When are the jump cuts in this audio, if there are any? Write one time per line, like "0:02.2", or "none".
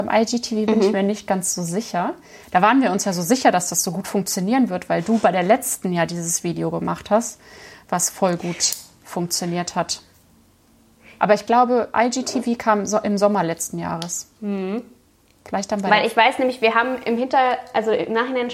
0:11.2
0:14.4